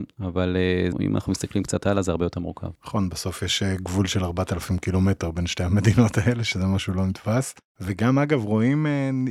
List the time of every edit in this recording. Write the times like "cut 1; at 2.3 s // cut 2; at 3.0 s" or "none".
cut 1; at 0.9 s // cut 2; at 2.8 s